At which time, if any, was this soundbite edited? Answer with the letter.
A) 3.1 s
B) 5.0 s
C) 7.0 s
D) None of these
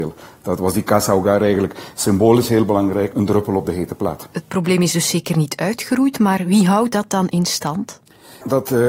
A